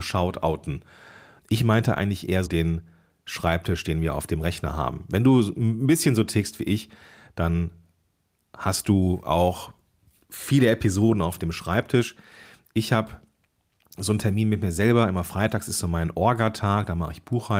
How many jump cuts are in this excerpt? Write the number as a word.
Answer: two